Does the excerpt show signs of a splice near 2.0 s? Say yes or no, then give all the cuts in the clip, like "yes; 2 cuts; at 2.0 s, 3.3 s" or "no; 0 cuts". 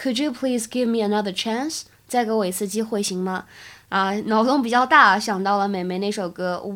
no; 0 cuts